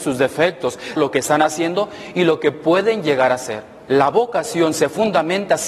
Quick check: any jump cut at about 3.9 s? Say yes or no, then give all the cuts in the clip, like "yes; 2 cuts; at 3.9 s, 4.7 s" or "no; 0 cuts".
yes; 2 cuts; at 1.0 s, 3.9 s